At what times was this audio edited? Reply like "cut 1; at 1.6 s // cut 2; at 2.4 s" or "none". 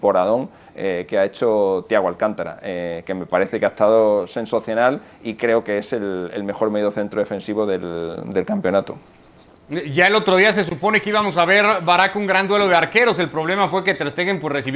none

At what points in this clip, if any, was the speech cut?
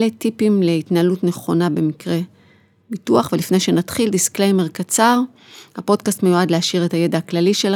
none

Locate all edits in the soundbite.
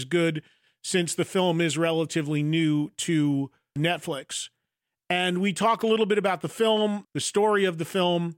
cut 1; at 3.8 s // cut 2; at 7.0 s

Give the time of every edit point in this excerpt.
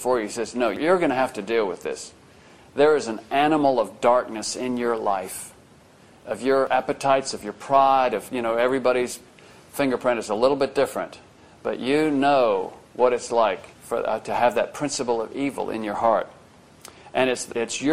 cut 1; at 8.3 s // cut 2; at 13.7 s

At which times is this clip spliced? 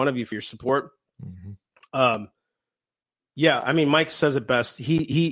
none

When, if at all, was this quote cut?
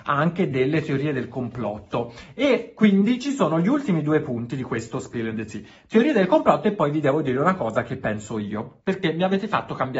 none

